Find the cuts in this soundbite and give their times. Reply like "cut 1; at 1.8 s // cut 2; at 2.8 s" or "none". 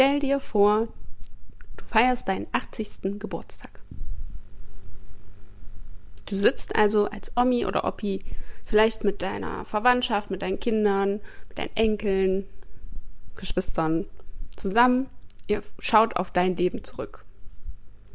none